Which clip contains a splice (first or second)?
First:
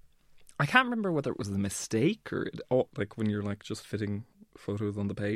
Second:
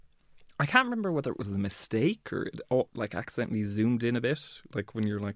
first